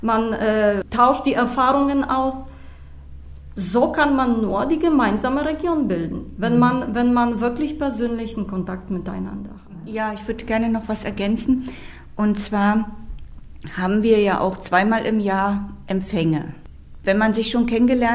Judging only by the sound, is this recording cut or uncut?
uncut